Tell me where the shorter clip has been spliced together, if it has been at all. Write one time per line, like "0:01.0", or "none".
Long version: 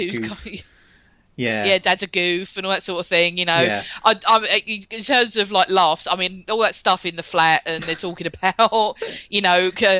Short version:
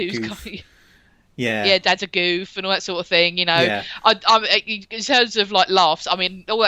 none